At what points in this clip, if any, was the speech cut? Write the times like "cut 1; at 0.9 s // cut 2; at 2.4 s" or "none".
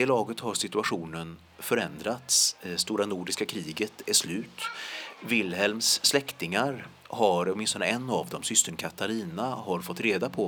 none